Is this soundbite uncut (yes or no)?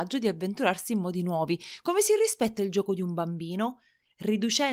no